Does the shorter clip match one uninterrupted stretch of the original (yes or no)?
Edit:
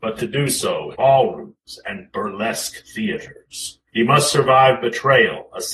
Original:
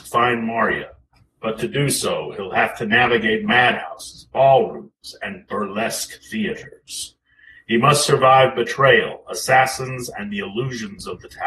no